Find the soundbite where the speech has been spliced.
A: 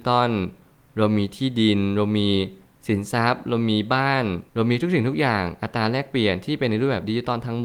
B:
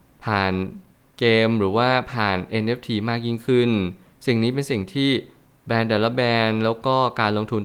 A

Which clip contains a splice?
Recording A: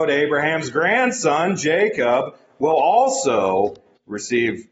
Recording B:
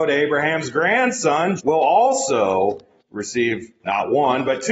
B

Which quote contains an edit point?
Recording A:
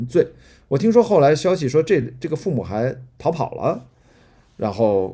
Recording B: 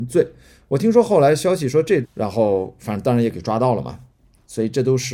B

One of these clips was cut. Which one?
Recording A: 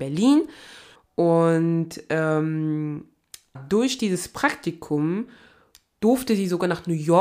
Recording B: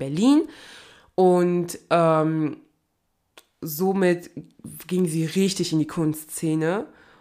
A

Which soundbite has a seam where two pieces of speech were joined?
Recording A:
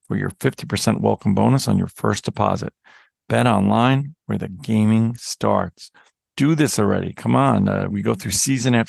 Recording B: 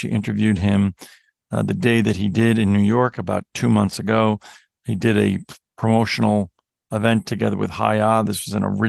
A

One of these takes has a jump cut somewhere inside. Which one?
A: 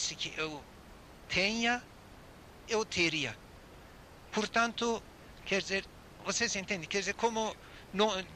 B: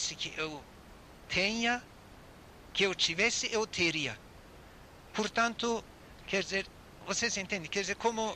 A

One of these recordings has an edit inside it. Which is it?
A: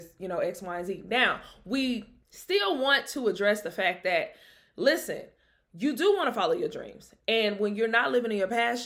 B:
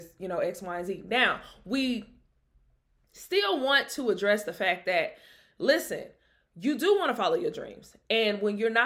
A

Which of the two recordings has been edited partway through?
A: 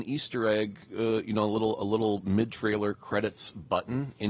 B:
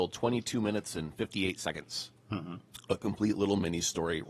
B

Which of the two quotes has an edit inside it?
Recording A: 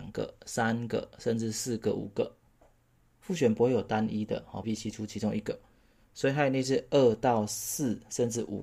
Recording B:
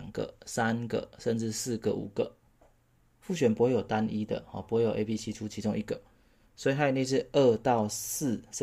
A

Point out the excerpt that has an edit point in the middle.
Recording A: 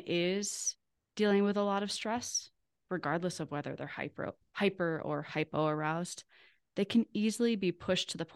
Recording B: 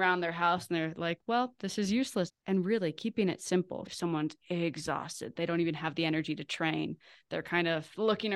B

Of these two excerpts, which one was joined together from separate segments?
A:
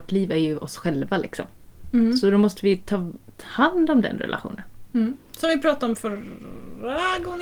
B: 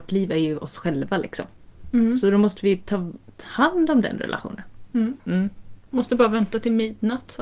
B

